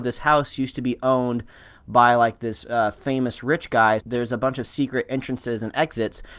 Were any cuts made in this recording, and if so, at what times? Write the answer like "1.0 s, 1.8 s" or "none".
4.0 s